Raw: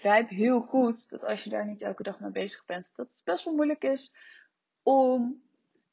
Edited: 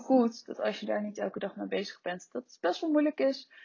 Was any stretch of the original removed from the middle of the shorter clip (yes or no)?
no